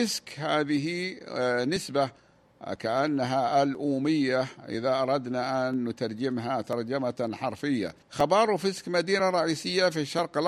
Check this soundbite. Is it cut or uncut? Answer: cut